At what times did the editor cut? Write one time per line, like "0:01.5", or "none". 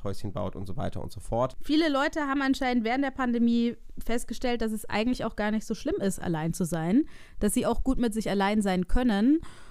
0:01.6